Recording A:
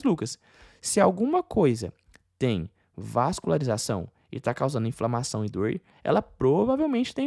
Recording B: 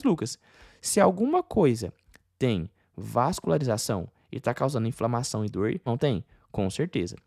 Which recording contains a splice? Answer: B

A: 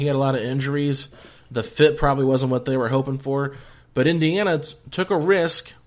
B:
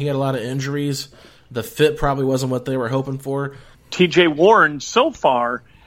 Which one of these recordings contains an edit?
B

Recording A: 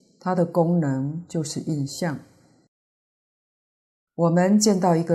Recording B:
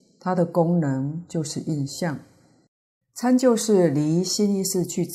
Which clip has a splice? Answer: B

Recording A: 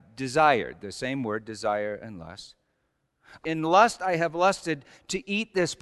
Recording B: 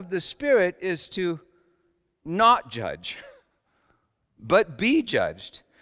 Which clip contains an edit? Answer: A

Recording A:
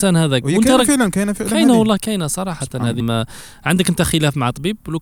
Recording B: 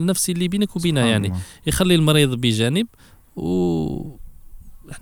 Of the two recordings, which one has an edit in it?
A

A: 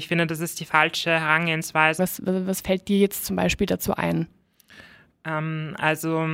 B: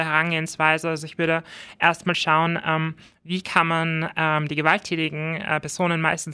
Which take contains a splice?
A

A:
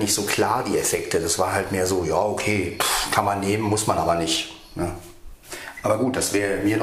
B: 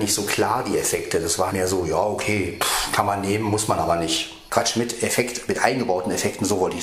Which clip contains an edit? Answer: B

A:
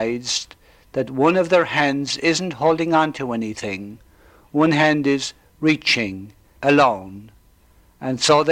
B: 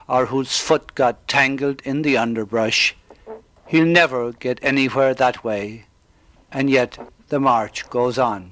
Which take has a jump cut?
A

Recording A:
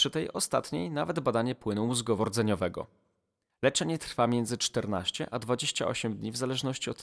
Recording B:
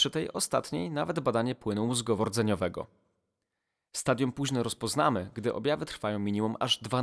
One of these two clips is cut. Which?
A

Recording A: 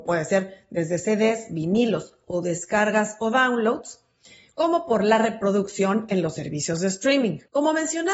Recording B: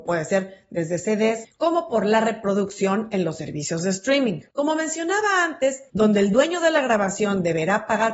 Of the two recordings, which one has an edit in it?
B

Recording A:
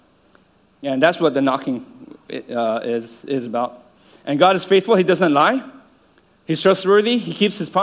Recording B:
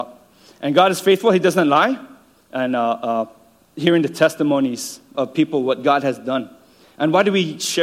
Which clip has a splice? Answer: B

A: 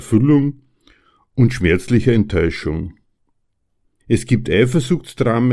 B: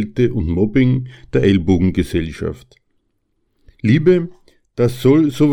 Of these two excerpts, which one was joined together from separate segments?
A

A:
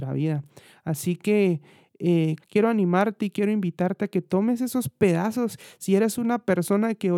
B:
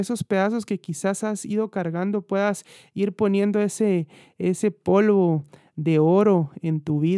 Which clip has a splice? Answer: A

